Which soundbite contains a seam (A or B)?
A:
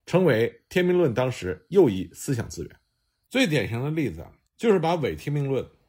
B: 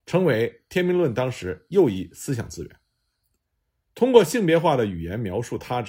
A